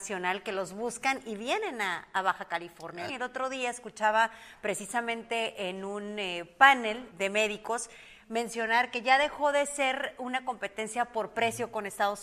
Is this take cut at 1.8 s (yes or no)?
no